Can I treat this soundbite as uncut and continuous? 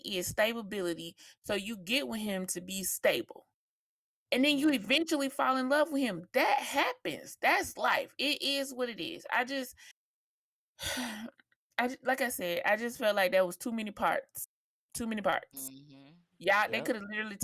yes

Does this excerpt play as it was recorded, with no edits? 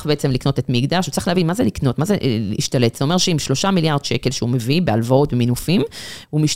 yes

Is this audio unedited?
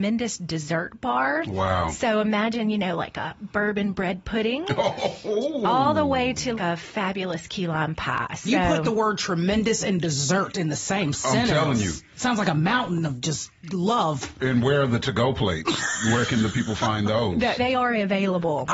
no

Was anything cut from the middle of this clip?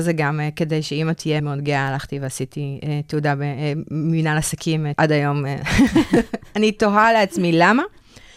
yes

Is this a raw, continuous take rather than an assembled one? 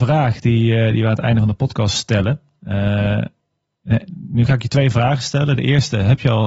yes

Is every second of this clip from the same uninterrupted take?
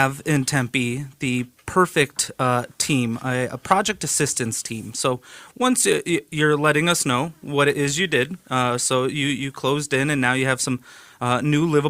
yes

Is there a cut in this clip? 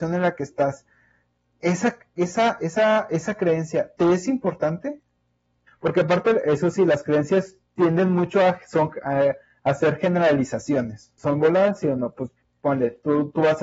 yes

